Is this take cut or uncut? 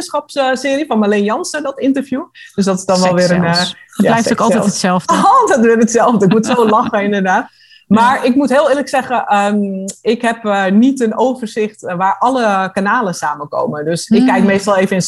uncut